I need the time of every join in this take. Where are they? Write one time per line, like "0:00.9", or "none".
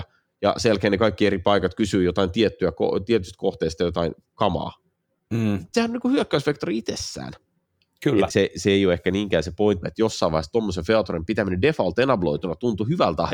0:08.3
0:09.8